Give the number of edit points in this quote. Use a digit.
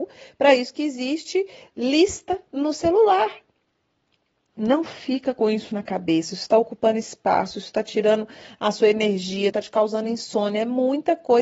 2